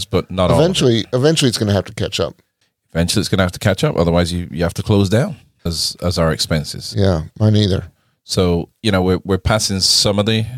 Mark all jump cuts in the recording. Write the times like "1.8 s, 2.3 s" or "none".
5.7 s